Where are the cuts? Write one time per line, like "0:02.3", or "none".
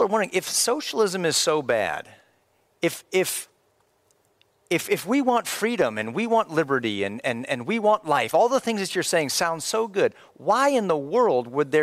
none